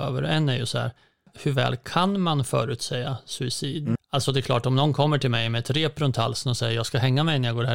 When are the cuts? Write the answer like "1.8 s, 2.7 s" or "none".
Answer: 4.0 s